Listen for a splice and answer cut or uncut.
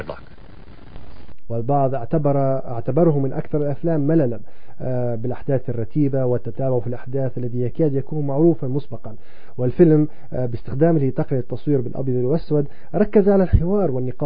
cut